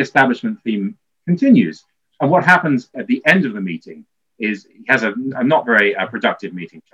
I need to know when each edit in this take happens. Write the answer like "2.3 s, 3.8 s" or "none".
2.9 s